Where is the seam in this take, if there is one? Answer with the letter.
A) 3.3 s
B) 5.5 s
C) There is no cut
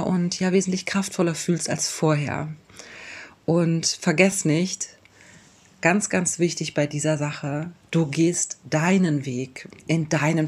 C